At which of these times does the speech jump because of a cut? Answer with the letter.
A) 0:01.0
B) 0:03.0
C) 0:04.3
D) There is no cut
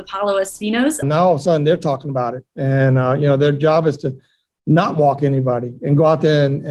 A